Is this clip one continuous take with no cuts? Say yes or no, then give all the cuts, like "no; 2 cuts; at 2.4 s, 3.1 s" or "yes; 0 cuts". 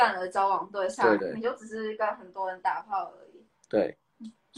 no; 1 cut; at 1.2 s